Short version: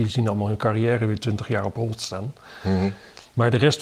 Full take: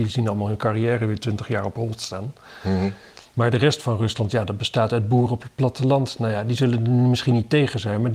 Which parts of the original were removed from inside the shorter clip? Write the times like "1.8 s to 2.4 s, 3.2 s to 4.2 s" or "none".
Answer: none